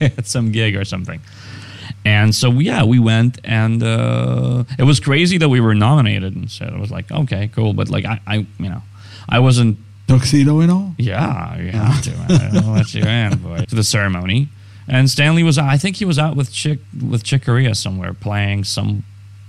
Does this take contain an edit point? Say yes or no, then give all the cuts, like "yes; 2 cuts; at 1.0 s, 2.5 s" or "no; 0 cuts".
yes; 1 cut; at 13.6 s